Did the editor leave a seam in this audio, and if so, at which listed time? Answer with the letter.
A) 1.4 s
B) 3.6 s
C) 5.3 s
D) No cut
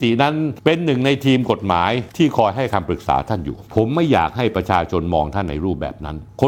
D